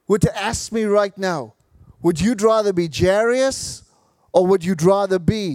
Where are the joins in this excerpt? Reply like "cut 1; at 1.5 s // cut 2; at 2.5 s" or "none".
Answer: none